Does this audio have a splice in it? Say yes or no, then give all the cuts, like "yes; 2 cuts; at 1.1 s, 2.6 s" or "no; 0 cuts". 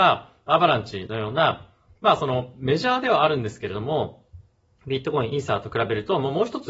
no; 0 cuts